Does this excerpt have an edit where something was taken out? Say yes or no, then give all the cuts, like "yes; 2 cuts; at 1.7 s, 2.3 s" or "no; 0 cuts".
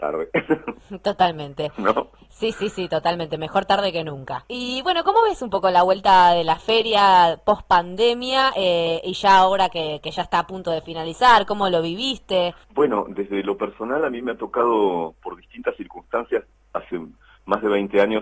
yes; 2 cuts; at 4.4 s, 12.6 s